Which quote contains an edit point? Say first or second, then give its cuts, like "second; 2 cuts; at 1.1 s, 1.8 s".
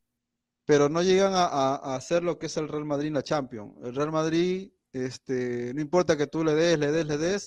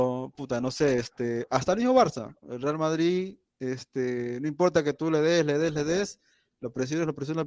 second; 1 cut; at 2.4 s